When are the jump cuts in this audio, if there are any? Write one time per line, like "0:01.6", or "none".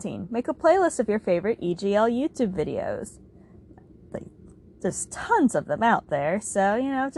none